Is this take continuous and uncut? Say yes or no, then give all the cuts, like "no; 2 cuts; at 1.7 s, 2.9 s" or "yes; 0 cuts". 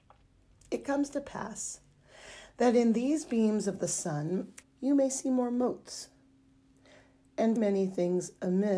no; 2 cuts; at 4.6 s, 7.6 s